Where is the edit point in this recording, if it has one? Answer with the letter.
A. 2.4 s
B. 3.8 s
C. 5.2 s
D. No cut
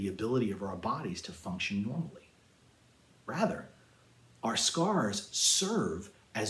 D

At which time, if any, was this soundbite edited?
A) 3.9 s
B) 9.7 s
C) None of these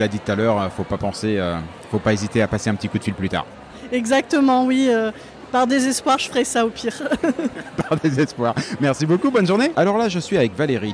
B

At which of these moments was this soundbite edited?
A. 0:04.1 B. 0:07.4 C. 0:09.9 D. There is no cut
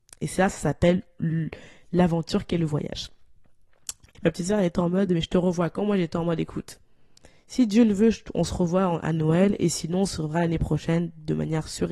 A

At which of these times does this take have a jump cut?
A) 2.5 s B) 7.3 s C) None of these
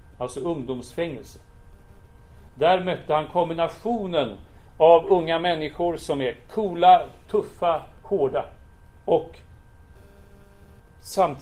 B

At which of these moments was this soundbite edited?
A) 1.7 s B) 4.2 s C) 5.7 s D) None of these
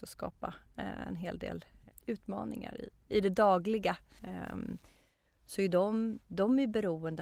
B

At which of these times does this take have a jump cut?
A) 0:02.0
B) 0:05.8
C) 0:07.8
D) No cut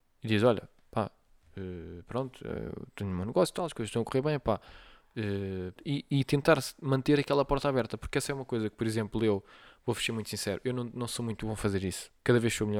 B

